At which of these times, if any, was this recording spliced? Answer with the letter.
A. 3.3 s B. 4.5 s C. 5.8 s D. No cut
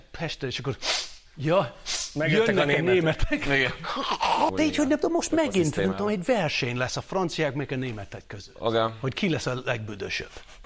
B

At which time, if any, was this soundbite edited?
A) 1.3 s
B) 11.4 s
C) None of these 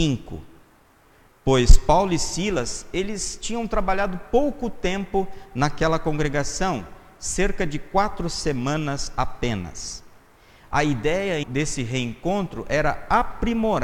B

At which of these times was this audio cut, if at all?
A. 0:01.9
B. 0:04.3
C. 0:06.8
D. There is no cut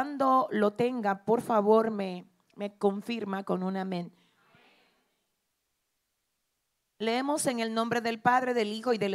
D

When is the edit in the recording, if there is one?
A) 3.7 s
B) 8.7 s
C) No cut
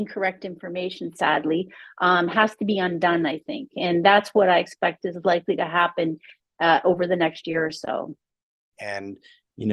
B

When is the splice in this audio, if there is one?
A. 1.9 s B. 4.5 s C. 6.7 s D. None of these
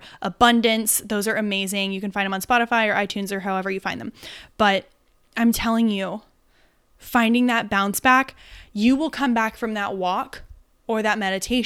D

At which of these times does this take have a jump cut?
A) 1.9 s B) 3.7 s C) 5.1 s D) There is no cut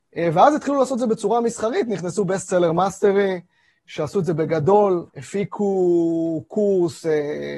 C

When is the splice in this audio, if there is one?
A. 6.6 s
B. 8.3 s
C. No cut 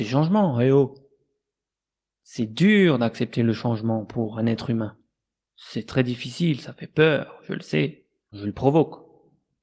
B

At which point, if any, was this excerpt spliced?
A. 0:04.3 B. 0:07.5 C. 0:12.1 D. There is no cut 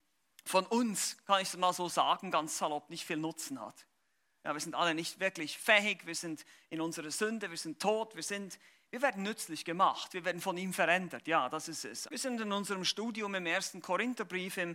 C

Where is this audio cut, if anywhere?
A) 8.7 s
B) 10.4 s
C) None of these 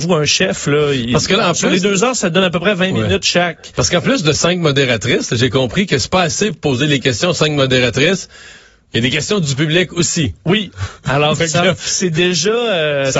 C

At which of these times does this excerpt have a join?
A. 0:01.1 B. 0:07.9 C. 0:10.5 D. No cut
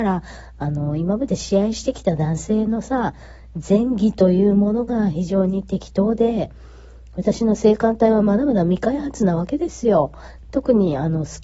C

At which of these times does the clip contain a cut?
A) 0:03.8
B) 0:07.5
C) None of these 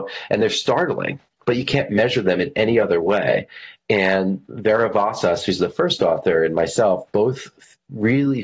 C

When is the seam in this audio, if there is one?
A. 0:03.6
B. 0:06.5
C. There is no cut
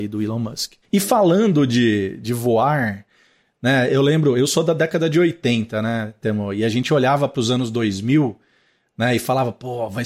C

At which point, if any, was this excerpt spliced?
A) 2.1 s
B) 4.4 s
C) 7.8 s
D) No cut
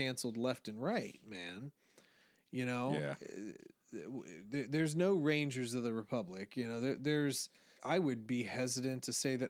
C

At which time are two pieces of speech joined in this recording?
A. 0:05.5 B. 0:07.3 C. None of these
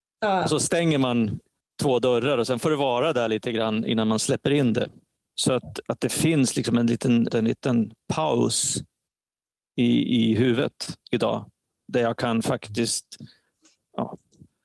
B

